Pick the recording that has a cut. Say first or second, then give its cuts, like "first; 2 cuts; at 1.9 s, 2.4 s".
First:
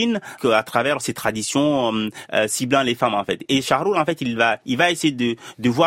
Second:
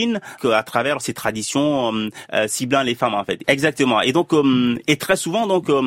second; 1 cut; at 3.4 s